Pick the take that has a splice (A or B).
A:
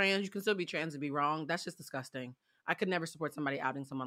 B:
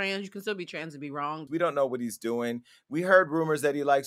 B